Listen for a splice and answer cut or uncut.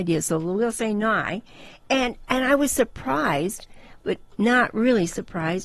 uncut